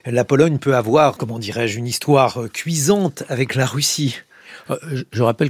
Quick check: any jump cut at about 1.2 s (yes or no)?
yes